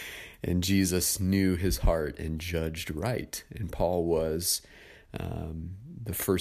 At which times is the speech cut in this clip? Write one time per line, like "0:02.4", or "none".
none